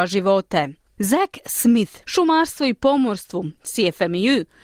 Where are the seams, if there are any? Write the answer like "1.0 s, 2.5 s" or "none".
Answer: 1.0 s, 2.0 s